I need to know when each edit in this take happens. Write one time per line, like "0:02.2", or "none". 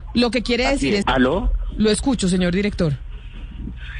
0:01.0

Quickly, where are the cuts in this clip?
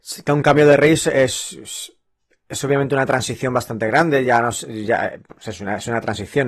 none

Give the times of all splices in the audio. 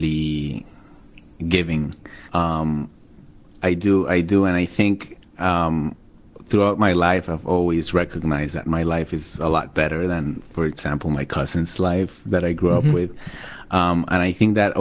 0:02.3

